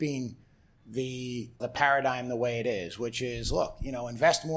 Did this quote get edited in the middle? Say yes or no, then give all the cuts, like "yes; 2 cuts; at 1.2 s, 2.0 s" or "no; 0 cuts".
yes; 1 cut; at 1.6 s